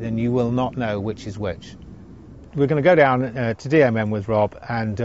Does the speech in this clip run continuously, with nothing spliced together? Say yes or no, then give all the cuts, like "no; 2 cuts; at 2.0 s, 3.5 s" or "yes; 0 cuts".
yes; 0 cuts